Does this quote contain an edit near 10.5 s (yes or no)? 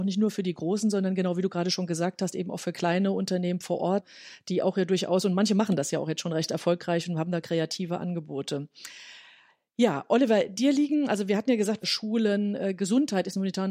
no